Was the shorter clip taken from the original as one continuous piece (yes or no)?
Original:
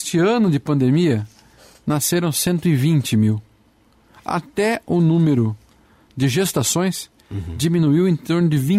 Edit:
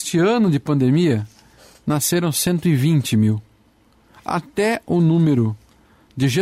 yes